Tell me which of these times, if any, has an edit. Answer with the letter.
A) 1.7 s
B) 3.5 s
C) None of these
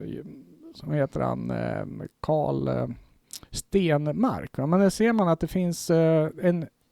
B